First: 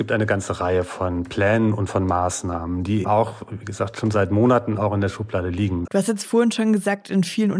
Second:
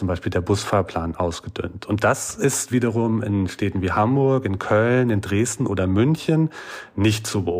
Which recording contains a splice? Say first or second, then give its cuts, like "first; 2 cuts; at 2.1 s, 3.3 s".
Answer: first; 2 cuts; at 3.0 s, 5.9 s